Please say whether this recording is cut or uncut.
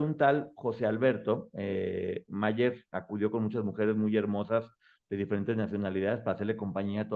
uncut